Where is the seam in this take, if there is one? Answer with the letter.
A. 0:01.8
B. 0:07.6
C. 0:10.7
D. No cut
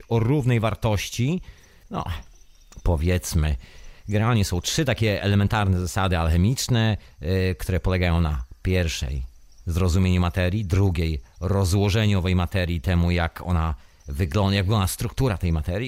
A